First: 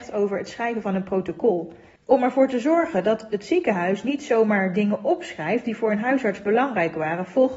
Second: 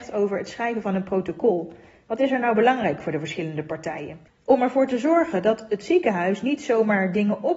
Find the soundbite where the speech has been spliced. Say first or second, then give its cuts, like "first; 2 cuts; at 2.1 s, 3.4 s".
first; 1 cut; at 2.0 s